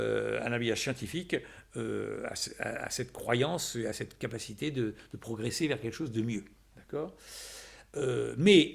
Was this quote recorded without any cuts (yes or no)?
yes